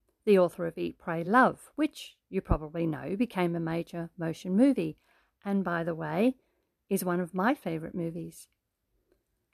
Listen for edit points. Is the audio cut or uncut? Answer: uncut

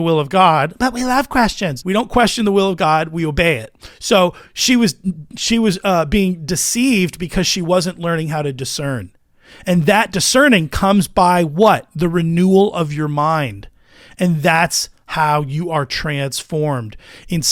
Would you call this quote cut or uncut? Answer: cut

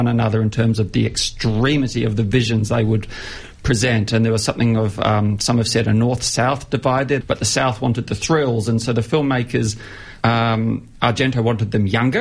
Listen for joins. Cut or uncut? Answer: cut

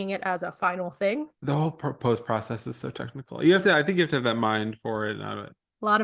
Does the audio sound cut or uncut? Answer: cut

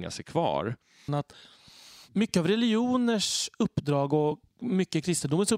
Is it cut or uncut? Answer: cut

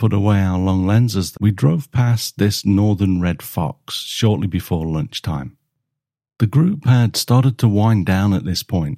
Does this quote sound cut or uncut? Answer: cut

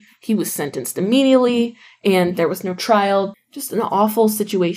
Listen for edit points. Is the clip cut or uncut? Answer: cut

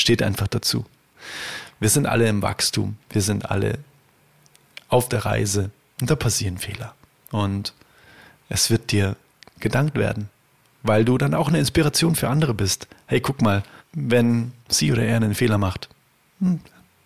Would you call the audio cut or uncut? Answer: cut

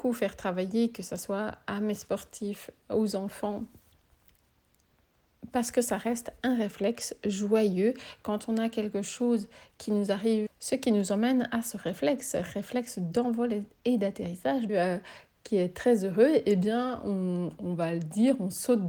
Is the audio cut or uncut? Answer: cut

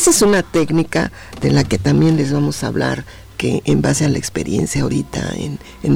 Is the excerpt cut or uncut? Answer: uncut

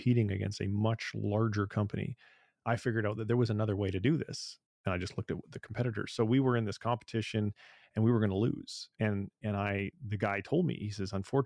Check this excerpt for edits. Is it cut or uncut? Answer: uncut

